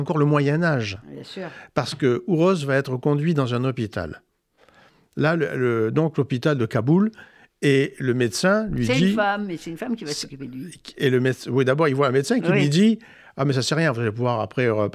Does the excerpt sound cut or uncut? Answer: uncut